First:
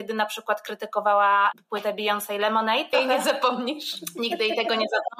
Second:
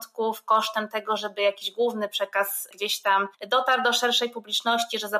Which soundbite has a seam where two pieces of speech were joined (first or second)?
first